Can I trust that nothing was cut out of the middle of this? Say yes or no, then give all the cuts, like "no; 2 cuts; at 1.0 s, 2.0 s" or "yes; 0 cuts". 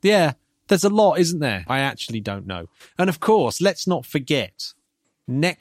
no; 1 cut; at 1.7 s